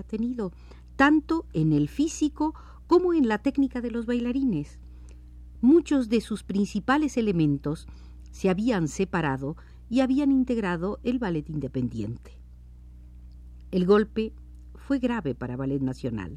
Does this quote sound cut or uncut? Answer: cut